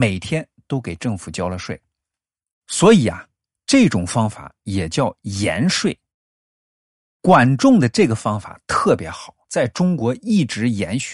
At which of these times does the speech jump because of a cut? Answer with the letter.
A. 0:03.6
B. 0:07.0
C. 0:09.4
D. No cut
D